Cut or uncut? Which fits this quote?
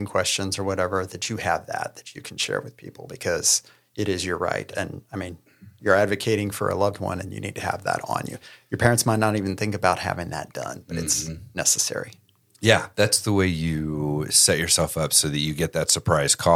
uncut